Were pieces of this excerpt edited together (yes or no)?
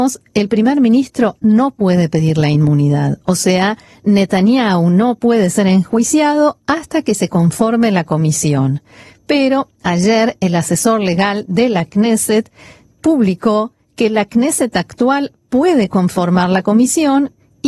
no